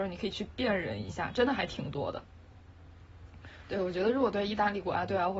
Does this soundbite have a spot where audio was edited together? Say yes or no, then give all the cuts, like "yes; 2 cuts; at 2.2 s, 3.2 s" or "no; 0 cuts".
no; 0 cuts